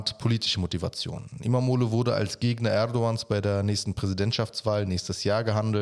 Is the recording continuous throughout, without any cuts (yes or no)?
yes